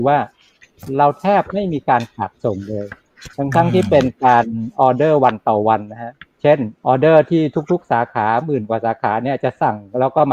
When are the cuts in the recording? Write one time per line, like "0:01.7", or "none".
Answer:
0:03.3
0:06.8